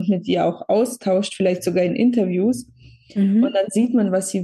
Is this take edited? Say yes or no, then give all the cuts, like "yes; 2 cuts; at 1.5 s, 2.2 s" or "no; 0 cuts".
no; 0 cuts